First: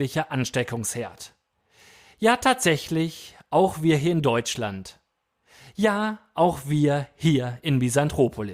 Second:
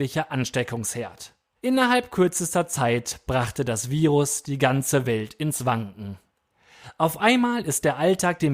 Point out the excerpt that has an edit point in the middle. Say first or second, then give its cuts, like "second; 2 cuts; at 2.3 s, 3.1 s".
second; 1 cut; at 1.6 s